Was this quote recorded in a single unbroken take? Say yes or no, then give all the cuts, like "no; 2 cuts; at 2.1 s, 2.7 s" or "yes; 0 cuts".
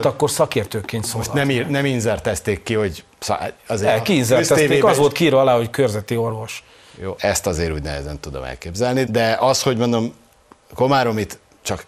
no; 2 cuts; at 7.2 s, 9.1 s